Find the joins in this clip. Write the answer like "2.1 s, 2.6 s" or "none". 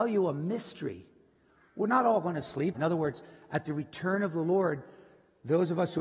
2.7 s